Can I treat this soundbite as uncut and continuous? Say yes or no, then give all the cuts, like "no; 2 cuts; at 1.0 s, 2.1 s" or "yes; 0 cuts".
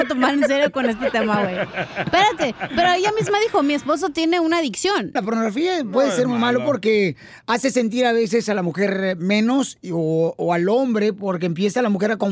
no; 1 cut; at 5.2 s